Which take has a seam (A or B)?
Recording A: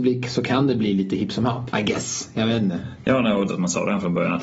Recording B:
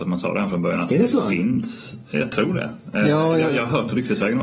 A